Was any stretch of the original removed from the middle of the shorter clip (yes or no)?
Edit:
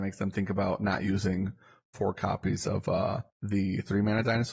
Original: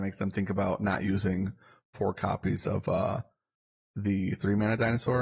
yes